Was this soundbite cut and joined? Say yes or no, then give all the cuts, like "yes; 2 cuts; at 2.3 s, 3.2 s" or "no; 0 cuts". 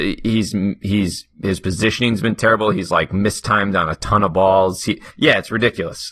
yes; 1 cut; at 5.1 s